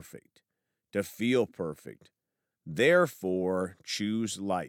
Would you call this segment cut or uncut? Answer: cut